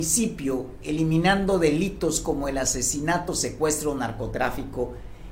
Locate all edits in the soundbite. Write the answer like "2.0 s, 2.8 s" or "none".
none